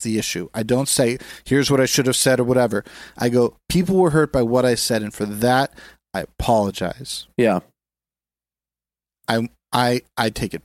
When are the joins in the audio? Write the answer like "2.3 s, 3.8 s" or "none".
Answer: none

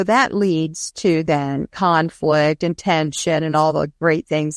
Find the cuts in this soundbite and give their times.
none

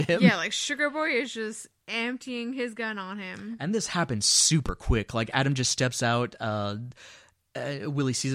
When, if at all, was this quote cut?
none

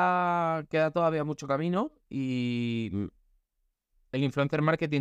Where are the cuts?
none

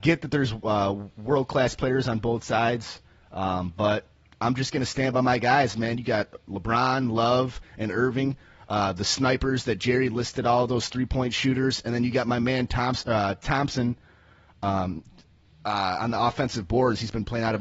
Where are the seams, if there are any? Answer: none

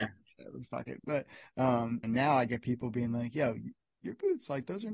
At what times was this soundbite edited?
2.0 s

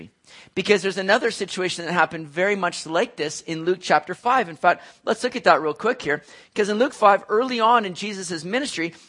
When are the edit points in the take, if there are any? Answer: none

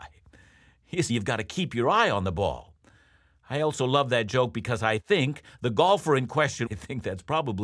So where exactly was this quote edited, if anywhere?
1.1 s, 6.7 s

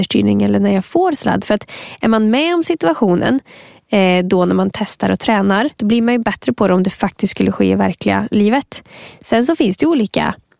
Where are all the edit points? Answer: 5.7 s

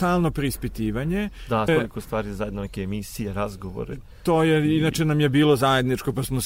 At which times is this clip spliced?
1.7 s

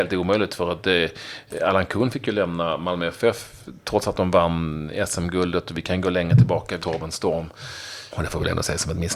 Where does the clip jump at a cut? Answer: 6.8 s, 8.1 s

